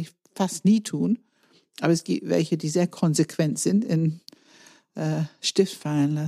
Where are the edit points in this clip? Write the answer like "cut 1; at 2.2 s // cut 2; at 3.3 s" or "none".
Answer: none